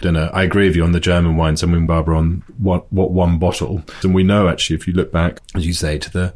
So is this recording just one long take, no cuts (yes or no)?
no